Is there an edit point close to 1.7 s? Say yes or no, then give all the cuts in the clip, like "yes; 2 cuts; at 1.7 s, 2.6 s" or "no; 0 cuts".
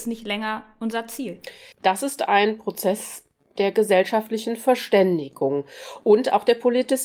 yes; 1 cut; at 1.7 s